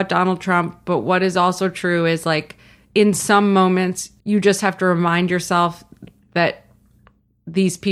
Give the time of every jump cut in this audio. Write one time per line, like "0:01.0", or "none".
0:04.2